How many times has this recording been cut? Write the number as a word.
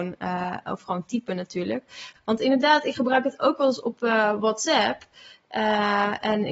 one